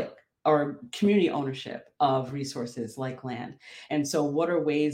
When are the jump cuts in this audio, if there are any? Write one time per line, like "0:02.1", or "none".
0:03.9